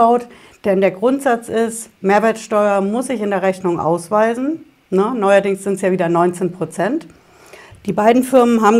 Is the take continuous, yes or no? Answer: no